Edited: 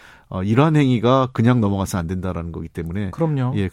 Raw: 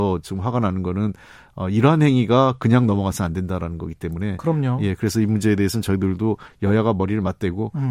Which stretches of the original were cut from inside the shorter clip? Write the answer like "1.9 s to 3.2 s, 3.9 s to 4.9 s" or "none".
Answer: none

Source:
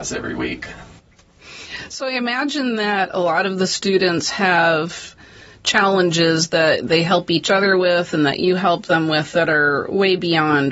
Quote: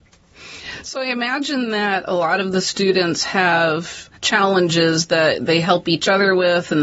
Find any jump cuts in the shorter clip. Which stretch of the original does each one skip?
5.2 s to 5.6 s

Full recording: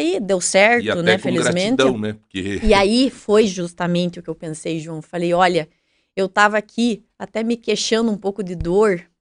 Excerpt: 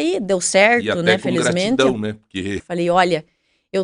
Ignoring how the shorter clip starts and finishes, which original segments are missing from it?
2.6 s to 5.0 s

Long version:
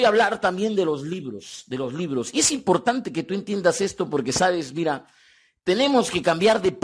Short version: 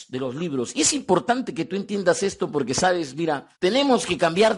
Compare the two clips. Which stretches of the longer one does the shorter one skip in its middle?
5.1 s to 5.6 s

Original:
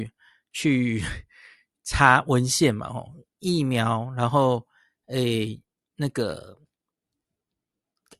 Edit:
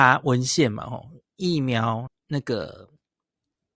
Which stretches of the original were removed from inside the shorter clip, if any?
4.1 s to 5.8 s

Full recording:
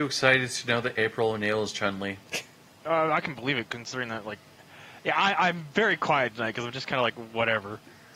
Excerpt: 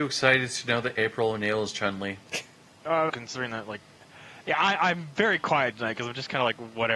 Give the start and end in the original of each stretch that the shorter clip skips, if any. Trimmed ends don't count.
3.1 s to 3.7 s

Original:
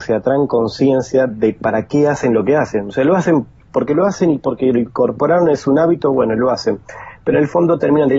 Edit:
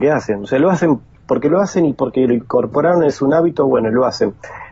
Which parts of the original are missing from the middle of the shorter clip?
none

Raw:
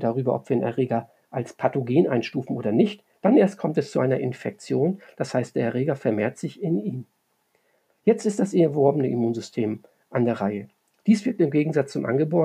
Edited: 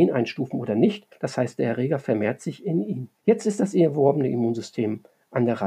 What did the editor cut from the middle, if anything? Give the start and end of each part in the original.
3.1 s to 5.1 s, 7.1 s to 8.0 s

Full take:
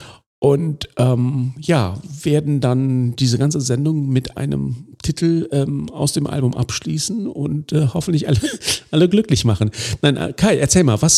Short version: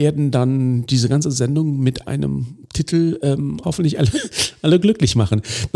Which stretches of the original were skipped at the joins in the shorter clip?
5.9 s to 7.9 s

